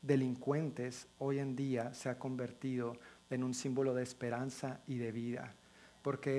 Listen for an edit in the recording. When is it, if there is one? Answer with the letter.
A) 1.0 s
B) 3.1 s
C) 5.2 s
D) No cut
D